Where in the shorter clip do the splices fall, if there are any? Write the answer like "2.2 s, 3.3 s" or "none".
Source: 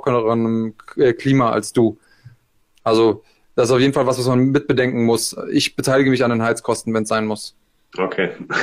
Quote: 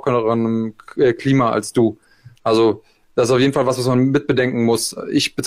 2.4 s